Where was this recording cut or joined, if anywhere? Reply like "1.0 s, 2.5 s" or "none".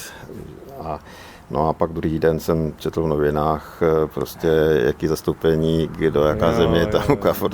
none